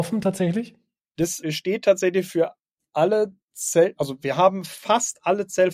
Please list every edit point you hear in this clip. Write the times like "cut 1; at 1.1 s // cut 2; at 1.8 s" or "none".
cut 1; at 1.4 s